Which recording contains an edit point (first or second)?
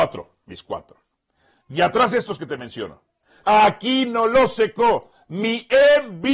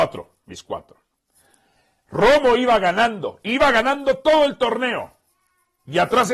first